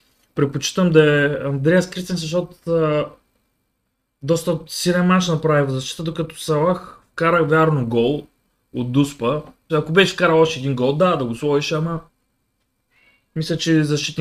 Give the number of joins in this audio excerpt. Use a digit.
1